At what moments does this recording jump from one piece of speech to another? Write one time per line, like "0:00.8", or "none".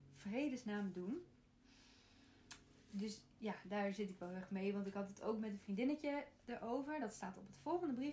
none